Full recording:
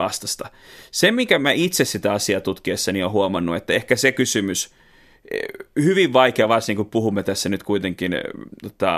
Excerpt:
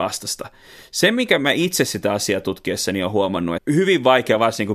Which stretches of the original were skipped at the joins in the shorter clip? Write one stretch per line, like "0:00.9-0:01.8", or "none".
0:03.6-0:05.7